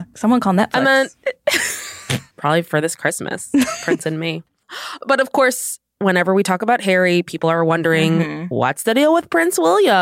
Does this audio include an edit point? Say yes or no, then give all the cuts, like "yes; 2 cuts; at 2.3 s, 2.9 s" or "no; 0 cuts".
yes; 1 cut; at 2.3 s